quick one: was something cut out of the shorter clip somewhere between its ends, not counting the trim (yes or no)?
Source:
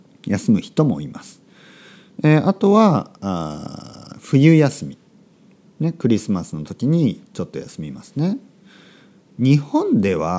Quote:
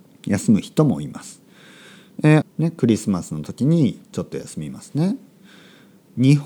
yes